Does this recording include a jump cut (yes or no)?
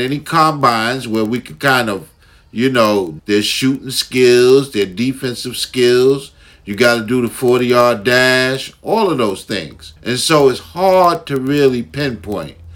yes